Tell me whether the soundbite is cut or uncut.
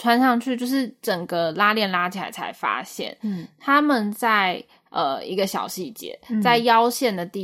uncut